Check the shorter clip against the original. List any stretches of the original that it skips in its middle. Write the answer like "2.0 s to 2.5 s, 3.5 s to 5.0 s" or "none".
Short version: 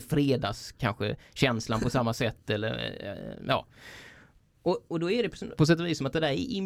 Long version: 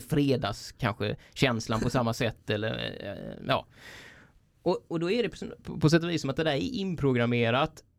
5.6 s to 5.8 s